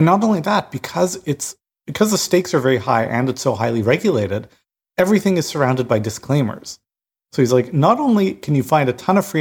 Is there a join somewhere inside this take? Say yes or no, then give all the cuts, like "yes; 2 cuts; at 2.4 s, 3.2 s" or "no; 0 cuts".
no; 0 cuts